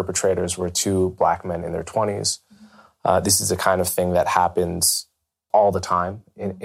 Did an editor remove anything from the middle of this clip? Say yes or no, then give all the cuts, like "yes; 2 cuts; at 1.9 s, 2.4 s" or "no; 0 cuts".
yes; 1 cut; at 5.5 s